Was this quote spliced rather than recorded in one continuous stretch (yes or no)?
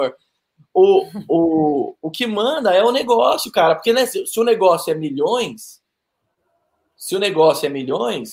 no